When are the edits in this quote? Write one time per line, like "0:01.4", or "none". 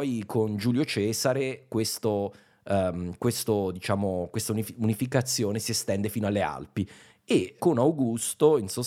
0:07.6